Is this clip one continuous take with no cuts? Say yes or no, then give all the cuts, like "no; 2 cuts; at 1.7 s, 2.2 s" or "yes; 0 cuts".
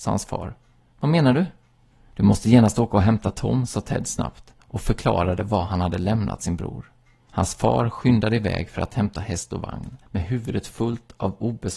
no; 1 cut; at 10.0 s